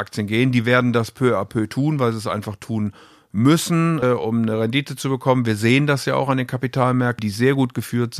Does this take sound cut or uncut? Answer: cut